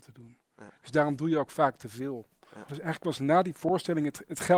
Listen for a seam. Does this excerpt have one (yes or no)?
yes